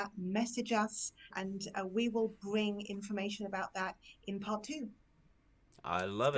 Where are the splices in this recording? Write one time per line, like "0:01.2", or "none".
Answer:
0:01.3

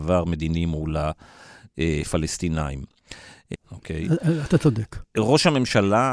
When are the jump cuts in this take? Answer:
0:03.5

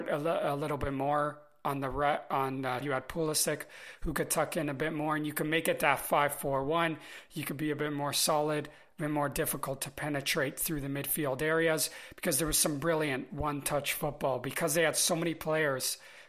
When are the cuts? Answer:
0:02.8

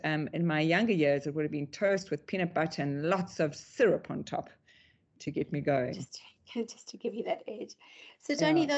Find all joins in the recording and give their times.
none

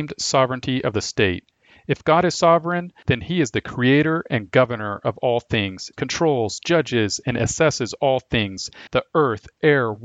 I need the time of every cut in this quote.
0:05.9
0:08.9

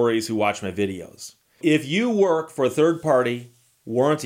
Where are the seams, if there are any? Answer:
0:01.6

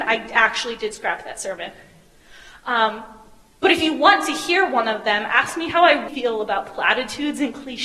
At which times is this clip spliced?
0:06.1

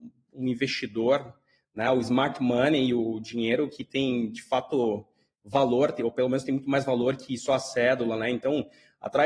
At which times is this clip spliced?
none

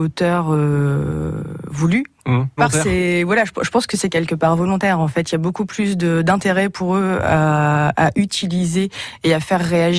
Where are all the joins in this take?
0:02.6

